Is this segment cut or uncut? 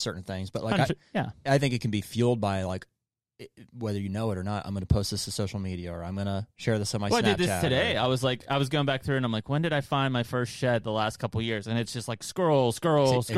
uncut